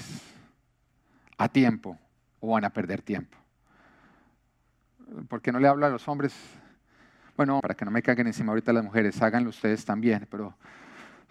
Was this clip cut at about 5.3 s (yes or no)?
no